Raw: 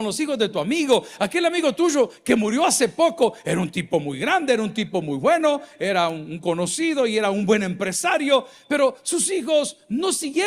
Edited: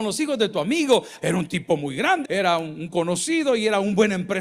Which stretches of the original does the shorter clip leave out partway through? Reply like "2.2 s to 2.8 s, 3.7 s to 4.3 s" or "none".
1.2 s to 3.4 s, 4.5 s to 5.7 s

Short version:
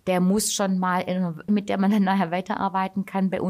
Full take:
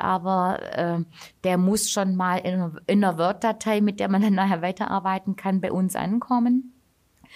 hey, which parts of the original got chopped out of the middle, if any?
2.9 s to 3.8 s

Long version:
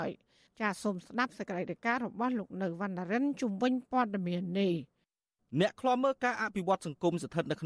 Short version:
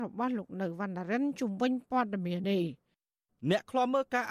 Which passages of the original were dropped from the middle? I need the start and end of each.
4.4 s to 4.5 s

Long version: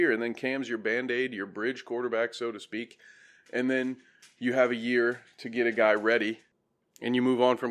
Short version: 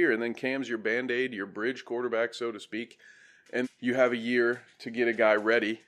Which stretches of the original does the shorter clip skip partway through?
3.6 s to 4.2 s

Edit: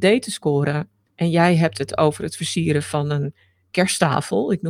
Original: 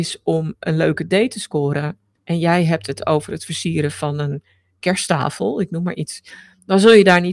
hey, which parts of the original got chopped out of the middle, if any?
none

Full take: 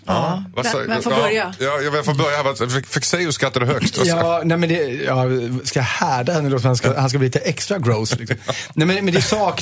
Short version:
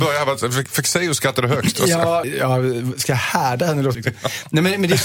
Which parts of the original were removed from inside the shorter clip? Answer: 4.4 s to 4.9 s, 6.6 s to 8.2 s

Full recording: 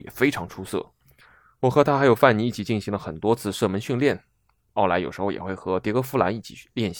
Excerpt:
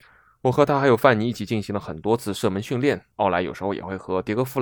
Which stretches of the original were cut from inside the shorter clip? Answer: 4.3 s to 4.7 s

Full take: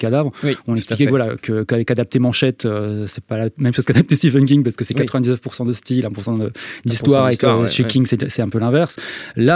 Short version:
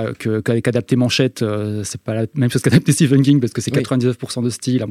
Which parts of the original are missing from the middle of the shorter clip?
none

